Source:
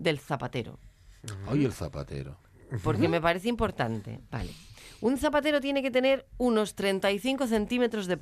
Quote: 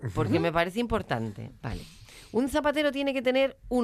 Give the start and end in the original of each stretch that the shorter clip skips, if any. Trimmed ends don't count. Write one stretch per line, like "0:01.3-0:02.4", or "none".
none